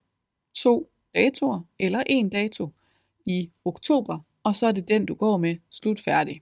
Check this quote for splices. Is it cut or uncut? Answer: uncut